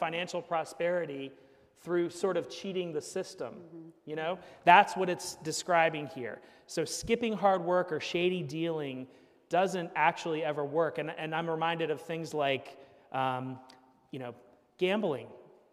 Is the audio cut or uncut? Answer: uncut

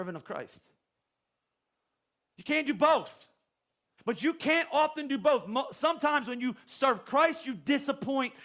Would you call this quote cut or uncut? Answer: cut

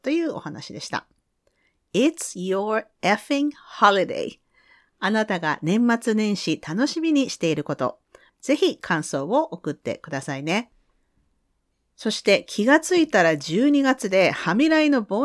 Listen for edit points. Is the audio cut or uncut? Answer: cut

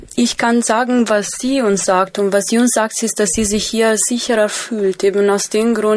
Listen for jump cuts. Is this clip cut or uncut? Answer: uncut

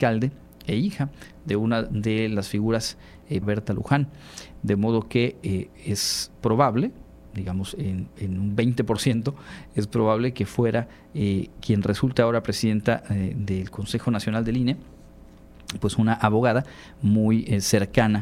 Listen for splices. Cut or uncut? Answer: cut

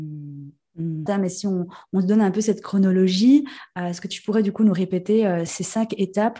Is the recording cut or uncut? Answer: cut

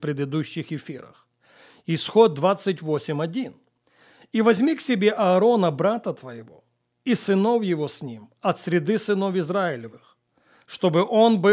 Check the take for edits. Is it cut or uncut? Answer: uncut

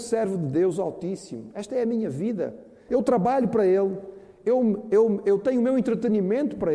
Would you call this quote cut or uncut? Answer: cut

